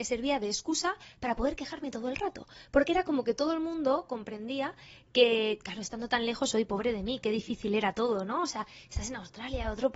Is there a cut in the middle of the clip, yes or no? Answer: no